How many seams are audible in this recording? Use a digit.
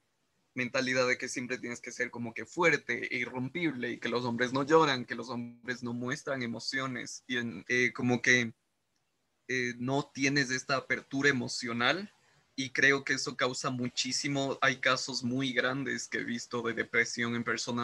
2